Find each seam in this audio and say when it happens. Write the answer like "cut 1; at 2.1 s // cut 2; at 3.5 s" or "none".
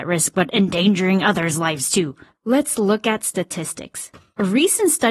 cut 1; at 2.3 s